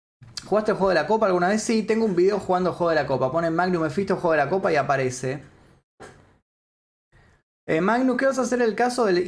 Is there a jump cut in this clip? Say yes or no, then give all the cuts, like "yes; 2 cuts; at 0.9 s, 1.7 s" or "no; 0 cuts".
no; 0 cuts